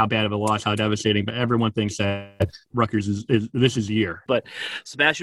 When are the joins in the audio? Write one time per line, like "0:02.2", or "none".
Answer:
0:02.7
0:04.3